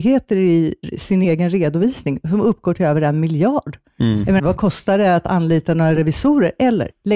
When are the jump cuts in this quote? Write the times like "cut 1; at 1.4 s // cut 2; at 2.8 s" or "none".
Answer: cut 1; at 1.2 s // cut 2; at 4.4 s